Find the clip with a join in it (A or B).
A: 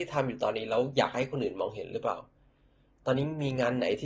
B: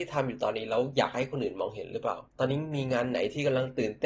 B